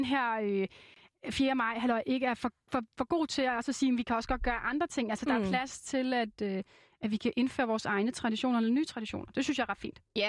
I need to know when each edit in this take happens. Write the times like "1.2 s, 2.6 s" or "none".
none